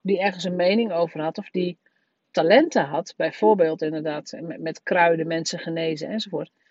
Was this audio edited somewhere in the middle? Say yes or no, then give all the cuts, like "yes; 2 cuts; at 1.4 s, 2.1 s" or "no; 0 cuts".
no; 0 cuts